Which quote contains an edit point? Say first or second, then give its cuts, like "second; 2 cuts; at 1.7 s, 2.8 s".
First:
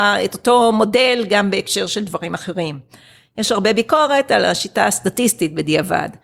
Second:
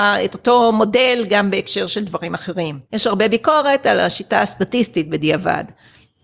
second; 1 cut; at 2.9 s